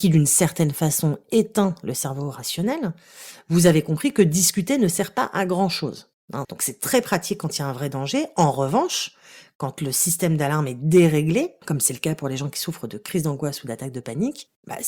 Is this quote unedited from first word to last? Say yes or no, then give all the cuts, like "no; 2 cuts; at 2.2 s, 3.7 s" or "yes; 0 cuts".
no; 1 cut; at 6.4 s